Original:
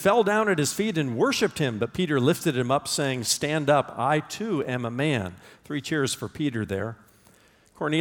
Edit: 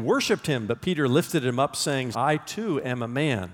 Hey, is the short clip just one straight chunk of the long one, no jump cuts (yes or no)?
no